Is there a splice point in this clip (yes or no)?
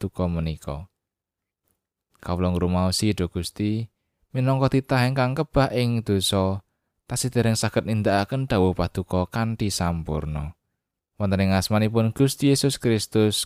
yes